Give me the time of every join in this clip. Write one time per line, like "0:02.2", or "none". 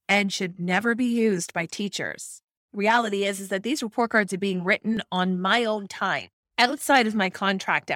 none